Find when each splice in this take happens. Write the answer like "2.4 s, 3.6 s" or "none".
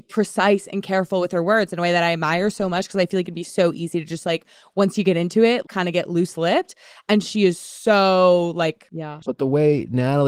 5.6 s, 9.2 s